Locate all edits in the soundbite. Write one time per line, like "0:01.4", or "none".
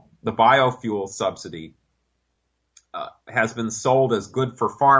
none